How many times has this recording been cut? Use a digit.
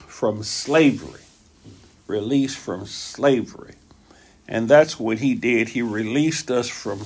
0